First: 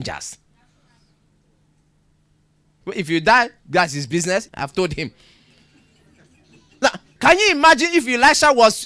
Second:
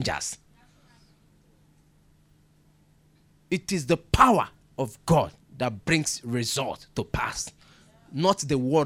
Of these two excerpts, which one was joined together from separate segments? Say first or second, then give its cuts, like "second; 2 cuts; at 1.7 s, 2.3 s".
first; 2 cuts; at 2.8 s, 4.5 s